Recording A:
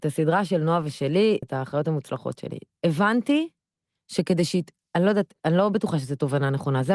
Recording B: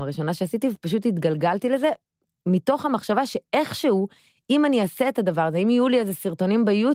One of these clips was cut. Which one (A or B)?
A